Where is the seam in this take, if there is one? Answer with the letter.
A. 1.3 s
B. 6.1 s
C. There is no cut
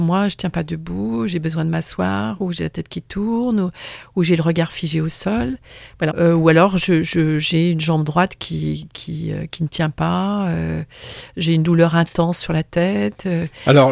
B